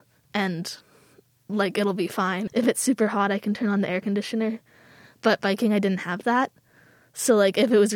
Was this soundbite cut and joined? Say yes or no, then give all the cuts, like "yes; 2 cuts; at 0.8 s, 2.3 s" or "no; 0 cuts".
yes; 1 cut; at 2.5 s